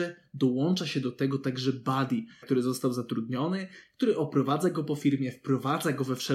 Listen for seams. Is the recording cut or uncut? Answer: cut